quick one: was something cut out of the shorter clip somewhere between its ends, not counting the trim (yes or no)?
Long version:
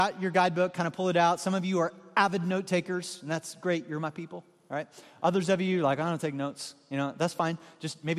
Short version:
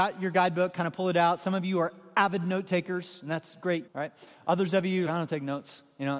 yes